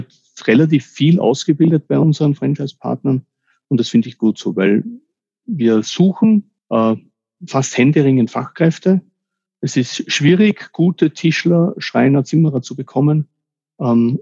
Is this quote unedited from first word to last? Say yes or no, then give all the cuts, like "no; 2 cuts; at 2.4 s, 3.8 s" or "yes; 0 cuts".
no; 1 cut; at 6.6 s